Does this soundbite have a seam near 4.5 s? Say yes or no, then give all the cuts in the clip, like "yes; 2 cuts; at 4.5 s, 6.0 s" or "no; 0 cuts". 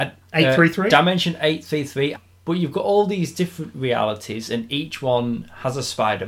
no; 1 cut; at 2.2 s